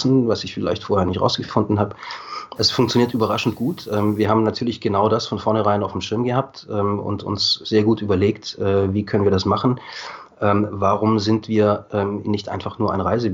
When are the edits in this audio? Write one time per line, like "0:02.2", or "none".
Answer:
0:02.6
0:12.2